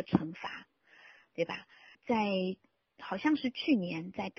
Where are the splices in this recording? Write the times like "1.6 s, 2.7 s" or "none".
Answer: 1.9 s